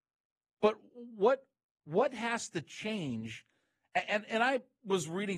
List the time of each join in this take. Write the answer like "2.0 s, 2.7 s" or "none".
none